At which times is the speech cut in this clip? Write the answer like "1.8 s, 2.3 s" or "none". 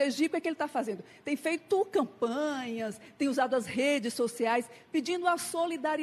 none